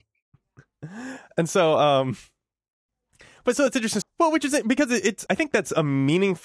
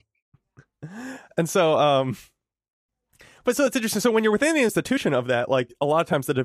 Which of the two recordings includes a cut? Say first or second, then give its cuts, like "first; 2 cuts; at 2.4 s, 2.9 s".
first; 2 cuts; at 4.0 s, 5.3 s